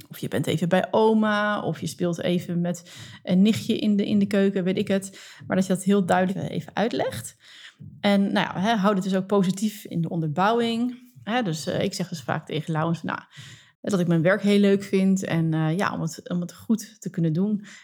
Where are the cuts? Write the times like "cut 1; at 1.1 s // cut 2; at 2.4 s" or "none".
none